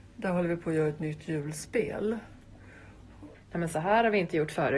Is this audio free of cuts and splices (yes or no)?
no